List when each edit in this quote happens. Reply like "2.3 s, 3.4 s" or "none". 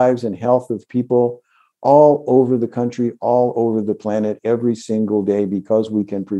none